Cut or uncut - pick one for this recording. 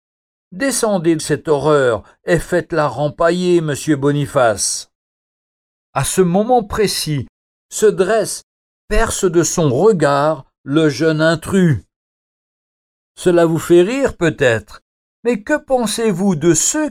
cut